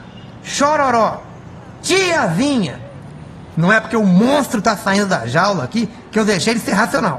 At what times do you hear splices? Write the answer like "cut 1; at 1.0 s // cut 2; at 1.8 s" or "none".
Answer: cut 1; at 1.8 s // cut 2; at 3.5 s